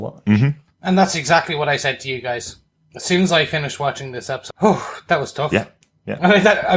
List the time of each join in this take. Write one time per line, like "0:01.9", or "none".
0:04.5